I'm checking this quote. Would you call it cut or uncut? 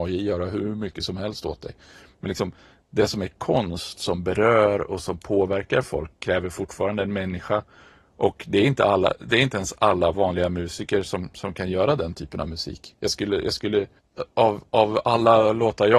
uncut